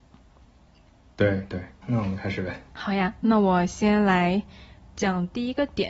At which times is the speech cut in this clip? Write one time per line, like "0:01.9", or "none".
0:01.8